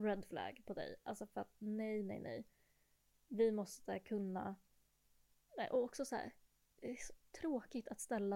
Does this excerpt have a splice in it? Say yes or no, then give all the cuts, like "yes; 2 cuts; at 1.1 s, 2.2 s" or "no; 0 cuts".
no; 0 cuts